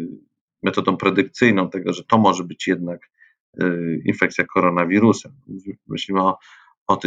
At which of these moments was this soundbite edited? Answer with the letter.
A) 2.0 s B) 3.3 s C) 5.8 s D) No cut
D